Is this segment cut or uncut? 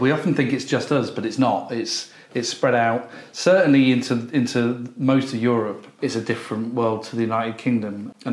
cut